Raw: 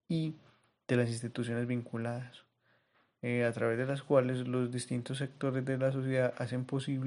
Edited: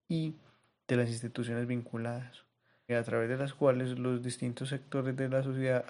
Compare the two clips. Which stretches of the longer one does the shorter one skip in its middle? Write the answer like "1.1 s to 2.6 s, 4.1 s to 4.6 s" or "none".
2.9 s to 3.4 s